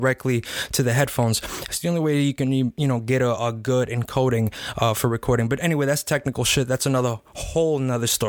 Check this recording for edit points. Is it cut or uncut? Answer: uncut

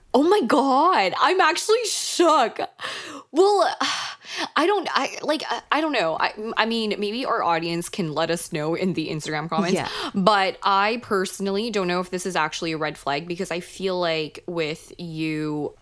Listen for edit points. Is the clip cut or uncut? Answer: uncut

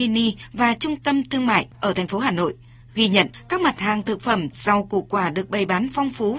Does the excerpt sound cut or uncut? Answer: uncut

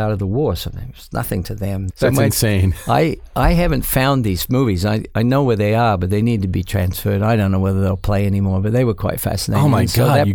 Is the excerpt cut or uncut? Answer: cut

